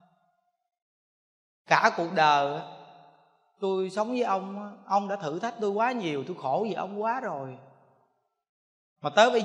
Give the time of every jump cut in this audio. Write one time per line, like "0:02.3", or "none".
none